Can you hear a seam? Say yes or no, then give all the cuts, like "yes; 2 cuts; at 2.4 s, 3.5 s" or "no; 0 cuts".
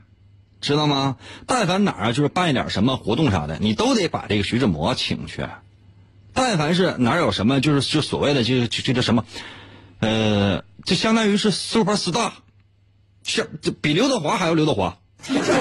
no; 0 cuts